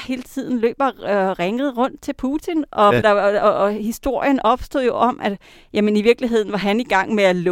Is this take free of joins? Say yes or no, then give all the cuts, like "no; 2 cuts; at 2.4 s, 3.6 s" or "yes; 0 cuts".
no; 1 cut; at 3.0 s